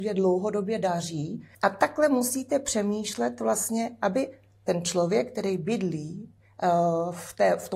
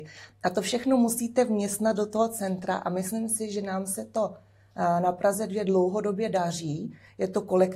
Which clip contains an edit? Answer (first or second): first